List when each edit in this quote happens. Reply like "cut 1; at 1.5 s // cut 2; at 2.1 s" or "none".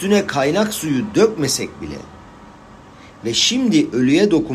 none